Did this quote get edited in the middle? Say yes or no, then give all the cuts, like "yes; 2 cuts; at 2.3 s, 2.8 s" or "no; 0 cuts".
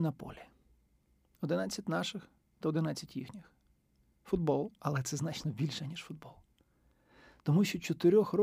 no; 0 cuts